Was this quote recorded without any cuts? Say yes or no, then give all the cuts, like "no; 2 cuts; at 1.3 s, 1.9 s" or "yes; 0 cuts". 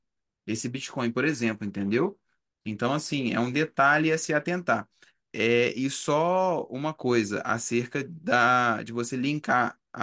yes; 0 cuts